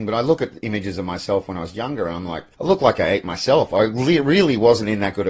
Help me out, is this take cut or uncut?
cut